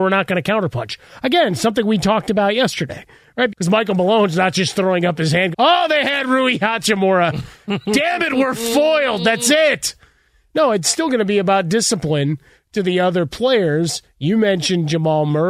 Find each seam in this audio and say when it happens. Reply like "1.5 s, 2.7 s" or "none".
3.5 s, 5.5 s